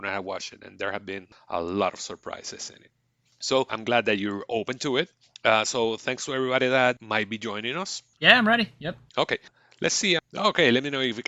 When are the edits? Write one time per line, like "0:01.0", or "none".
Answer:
0:08.2
0:10.2